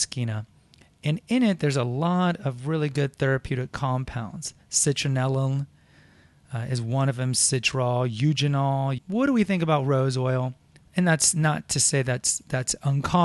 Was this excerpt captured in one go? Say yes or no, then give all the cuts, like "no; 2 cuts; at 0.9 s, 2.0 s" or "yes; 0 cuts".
no; 2 cuts; at 9.0 s, 10.9 s